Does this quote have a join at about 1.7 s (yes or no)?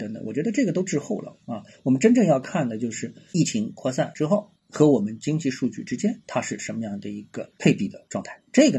no